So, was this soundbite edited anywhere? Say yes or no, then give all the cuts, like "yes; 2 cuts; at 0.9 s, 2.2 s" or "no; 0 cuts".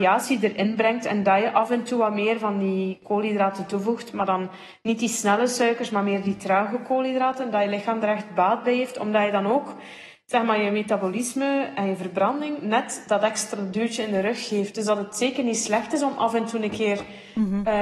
no; 0 cuts